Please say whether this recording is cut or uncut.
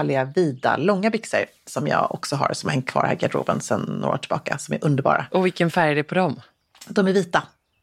uncut